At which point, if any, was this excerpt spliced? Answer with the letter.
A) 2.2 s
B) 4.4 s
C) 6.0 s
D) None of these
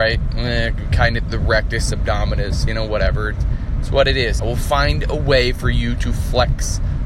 B